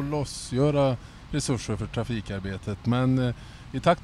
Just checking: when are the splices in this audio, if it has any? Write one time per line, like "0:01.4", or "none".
none